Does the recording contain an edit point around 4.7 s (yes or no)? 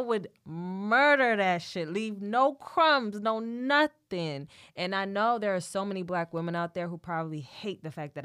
no